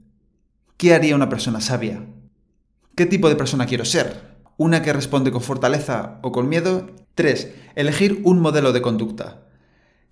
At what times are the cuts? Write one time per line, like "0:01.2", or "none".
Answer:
0:07.0

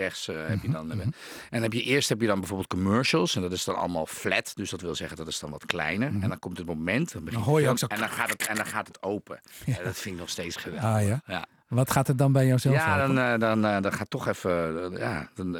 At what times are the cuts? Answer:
none

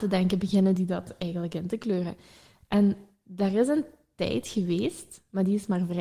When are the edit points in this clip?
none

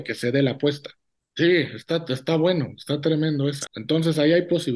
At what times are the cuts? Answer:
0:01.2
0:03.7

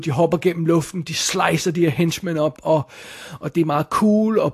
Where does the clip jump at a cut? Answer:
0:02.6

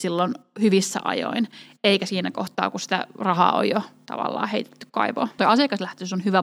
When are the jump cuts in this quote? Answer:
0:05.4

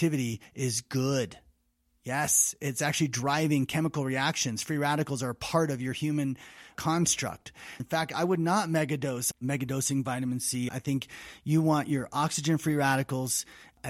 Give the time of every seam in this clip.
0:07.8
0:09.3
0:10.7

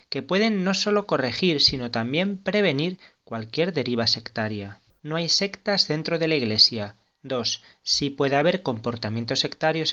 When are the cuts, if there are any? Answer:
0:05.0

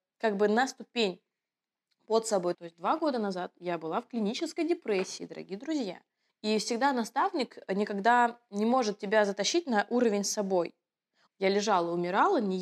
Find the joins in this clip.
0:02.5
0:06.3
0:11.3

